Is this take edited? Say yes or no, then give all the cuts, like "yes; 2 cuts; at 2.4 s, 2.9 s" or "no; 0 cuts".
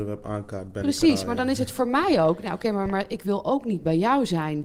no; 0 cuts